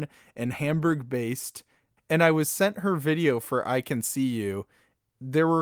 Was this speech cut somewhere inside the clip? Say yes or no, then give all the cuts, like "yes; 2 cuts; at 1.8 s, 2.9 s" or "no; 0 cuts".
no; 0 cuts